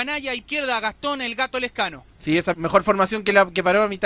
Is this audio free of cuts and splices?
no; 1 cut; at 2.5 s

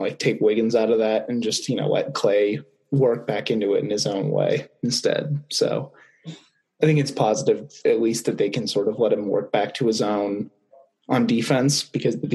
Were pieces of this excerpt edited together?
no; 0 cuts

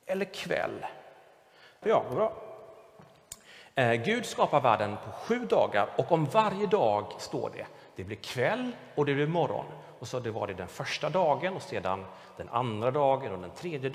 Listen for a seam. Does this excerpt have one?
yes; 1 cut; at 1.8 s

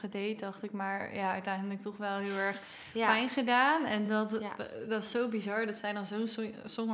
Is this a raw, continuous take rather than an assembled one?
yes; 0 cuts

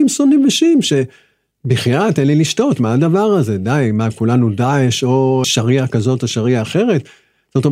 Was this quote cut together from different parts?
yes; 1 cut; at 5.4 s

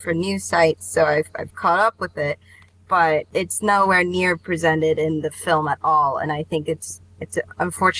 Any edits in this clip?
no; 0 cuts

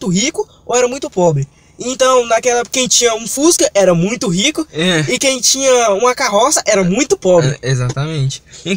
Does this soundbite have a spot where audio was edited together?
no; 0 cuts

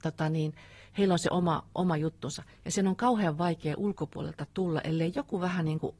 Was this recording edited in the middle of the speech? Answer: no; 0 cuts

